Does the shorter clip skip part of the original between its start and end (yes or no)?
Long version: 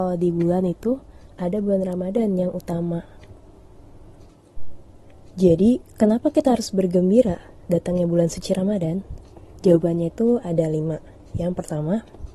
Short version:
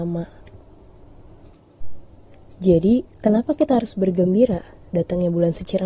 no